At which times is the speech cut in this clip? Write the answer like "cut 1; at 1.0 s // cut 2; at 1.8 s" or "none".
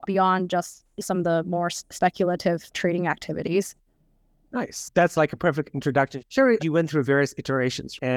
cut 1; at 6.6 s